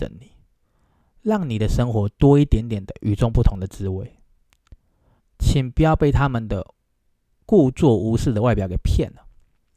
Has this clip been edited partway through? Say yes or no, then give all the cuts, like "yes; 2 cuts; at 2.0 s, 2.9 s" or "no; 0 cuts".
yes; 1 cut; at 5.2 s